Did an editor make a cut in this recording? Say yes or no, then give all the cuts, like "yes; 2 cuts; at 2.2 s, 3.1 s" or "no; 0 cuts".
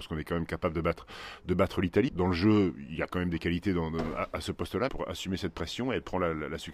yes; 2 cuts; at 2.1 s, 4.9 s